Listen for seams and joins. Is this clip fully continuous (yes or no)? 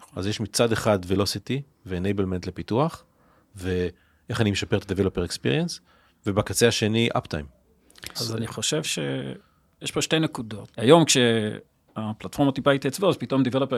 no